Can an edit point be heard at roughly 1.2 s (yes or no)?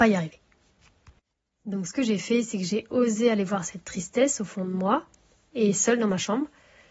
no